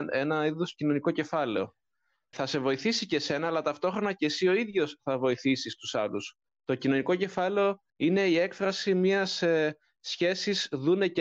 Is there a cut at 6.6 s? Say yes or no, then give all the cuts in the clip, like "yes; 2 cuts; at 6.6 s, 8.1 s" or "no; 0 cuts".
no; 2 cuts; at 2.3 s, 7.9 s